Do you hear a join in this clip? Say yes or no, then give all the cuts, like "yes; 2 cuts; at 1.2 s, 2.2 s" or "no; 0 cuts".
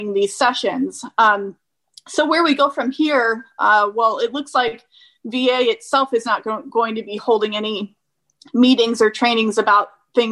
no; 0 cuts